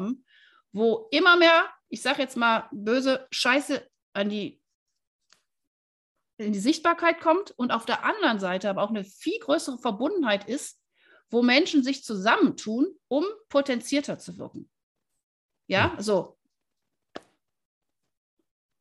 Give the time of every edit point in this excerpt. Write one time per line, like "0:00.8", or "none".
0:01.8